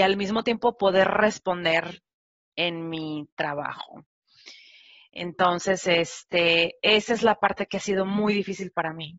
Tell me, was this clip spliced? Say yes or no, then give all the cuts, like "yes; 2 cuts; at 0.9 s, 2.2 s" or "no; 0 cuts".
no; 0 cuts